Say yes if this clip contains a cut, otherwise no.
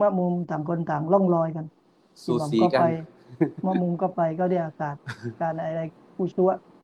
no